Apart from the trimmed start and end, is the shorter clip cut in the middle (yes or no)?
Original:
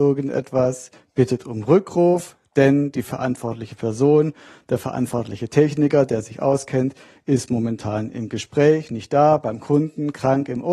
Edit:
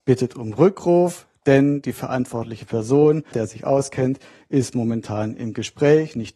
yes